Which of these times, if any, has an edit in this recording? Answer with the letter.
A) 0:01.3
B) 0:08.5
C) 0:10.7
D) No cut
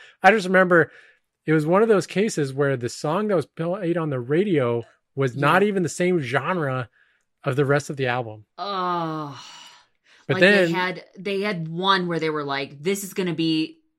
D